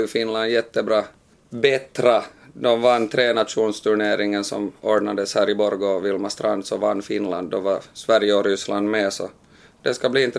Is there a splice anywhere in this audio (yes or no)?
no